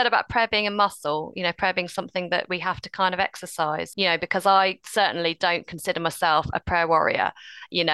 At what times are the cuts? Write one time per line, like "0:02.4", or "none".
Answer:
0:03.9